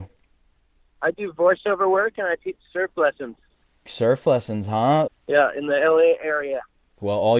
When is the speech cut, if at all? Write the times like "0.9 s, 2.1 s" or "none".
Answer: 5.1 s